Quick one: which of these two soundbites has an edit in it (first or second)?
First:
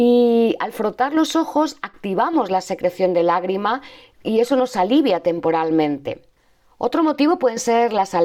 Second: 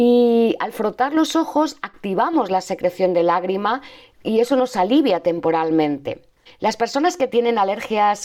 second